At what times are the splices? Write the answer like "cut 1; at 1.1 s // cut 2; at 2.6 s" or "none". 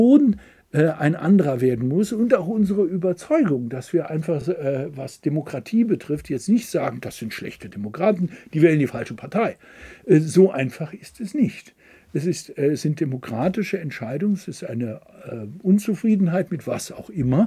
none